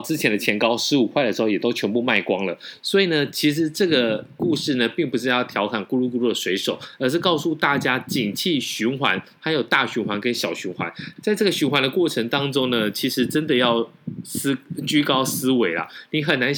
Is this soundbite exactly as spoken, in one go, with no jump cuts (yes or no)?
no